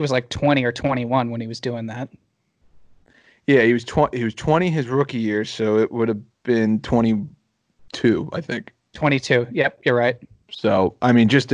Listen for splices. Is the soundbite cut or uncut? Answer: uncut